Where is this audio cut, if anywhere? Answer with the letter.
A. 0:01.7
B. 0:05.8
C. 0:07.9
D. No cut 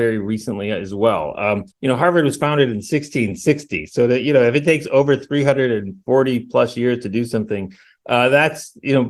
A